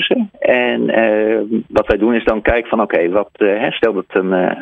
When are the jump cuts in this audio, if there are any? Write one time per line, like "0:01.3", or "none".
none